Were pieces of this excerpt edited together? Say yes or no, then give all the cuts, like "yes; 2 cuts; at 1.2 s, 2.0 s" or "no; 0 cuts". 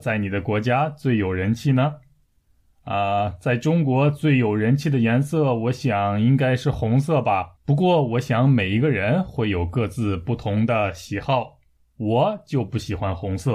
yes; 1 cut; at 7.6 s